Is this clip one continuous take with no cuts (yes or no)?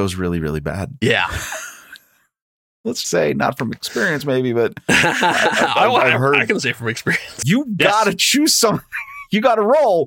no